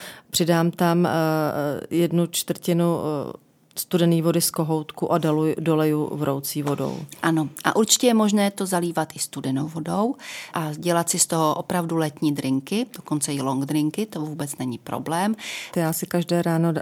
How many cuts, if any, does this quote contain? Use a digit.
1